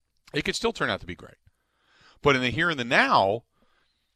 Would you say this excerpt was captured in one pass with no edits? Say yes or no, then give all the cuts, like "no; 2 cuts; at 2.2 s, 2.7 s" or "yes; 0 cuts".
yes; 0 cuts